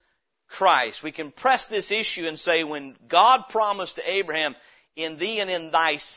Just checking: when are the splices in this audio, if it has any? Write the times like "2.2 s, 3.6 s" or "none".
none